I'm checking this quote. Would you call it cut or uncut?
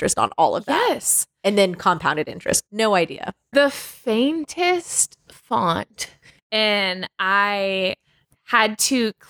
cut